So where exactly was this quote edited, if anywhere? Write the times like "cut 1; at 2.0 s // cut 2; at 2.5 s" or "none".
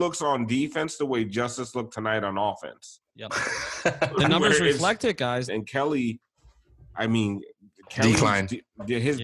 cut 1; at 5.5 s